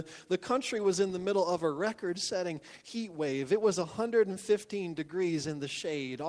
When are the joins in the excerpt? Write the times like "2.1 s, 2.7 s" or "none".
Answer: none